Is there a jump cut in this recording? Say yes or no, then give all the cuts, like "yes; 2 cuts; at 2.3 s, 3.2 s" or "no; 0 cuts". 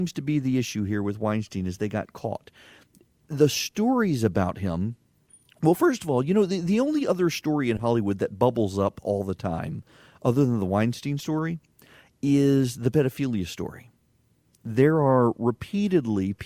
no; 0 cuts